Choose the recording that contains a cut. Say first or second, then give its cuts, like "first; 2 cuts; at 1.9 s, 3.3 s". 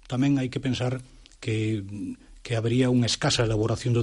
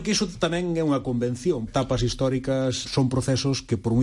second; 2 cuts; at 1.7 s, 2.8 s